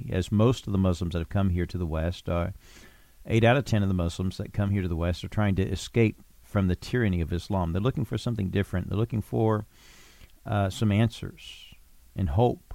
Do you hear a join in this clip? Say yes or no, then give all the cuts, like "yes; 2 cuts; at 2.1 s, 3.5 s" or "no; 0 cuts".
no; 0 cuts